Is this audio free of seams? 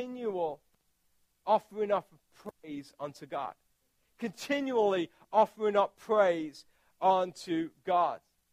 yes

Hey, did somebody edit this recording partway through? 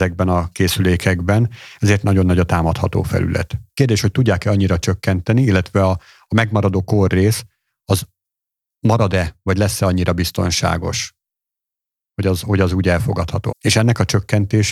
yes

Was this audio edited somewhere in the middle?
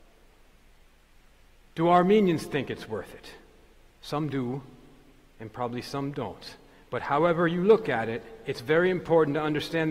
no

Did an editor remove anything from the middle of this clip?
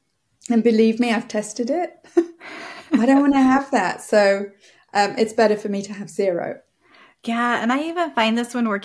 no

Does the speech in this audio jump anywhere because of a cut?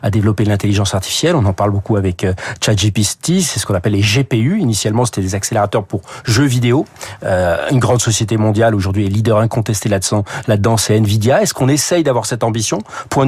no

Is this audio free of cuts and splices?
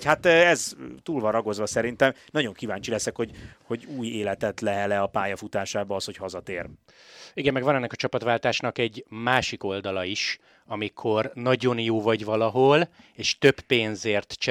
yes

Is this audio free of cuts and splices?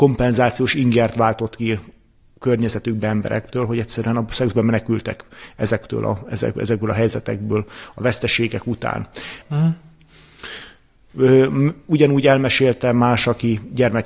no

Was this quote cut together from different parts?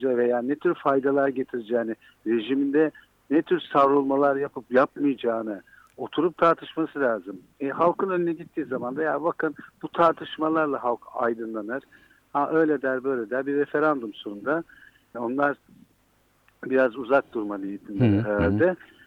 yes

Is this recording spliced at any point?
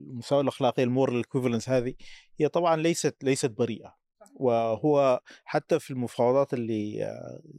no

